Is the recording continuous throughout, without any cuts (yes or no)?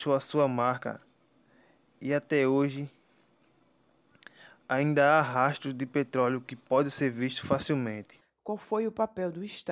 no